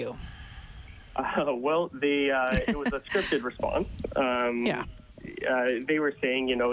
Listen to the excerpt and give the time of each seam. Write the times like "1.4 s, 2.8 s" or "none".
none

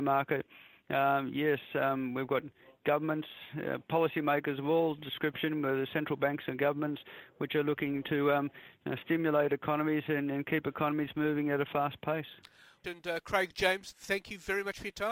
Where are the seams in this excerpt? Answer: 12.8 s, 13.9 s

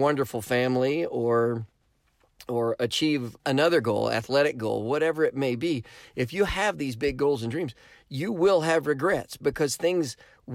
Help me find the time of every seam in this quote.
3.4 s

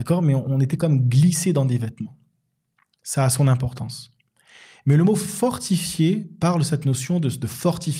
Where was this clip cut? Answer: none

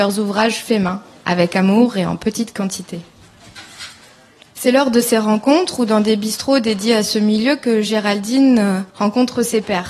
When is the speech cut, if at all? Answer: 8.9 s

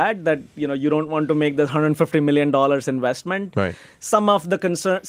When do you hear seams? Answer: none

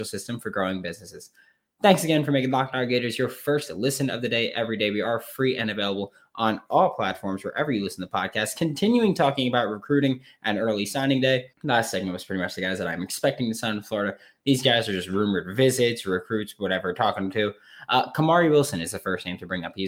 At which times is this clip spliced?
11.5 s

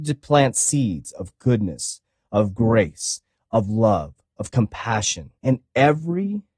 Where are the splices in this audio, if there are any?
5.4 s

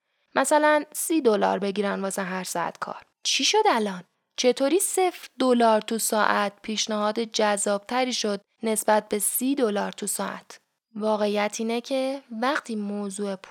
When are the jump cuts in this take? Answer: 3.1 s

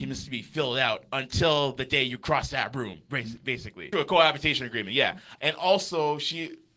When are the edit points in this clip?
3.9 s, 5.4 s

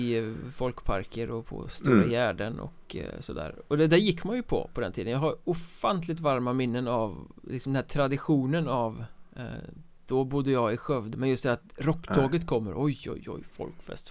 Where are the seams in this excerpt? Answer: 11.1 s

